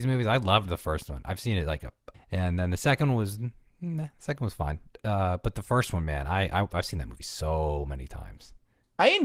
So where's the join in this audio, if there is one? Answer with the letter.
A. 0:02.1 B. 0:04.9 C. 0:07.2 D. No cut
A